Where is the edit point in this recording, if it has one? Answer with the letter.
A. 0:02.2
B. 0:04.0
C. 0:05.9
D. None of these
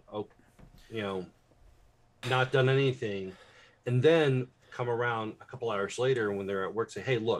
A